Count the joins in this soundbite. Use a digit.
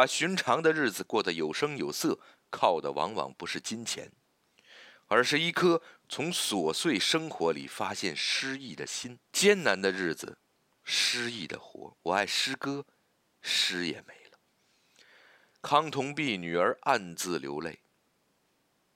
2